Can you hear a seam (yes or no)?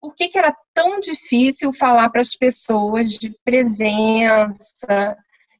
no